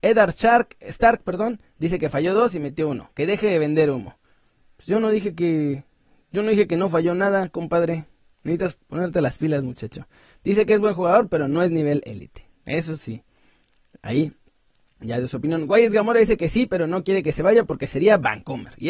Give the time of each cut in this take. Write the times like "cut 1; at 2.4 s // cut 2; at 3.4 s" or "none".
cut 1; at 8.7 s